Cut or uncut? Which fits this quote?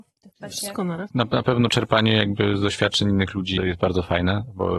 cut